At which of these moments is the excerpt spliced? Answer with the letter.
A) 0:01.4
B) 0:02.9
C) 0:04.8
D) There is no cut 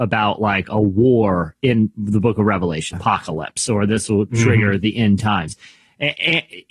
B